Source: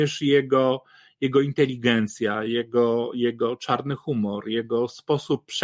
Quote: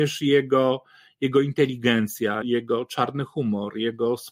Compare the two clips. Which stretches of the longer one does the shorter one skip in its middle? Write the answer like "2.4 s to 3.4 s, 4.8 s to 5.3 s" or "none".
2.4 s to 3.1 s

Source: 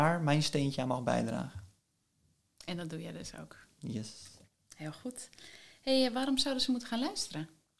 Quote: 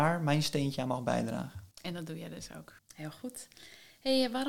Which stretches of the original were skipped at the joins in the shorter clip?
1.7 s to 2.5 s, 3.6 s to 4.6 s

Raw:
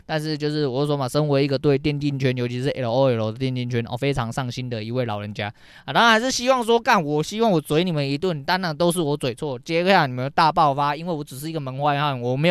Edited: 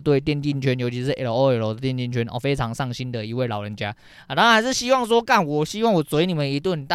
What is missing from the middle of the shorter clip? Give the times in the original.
none

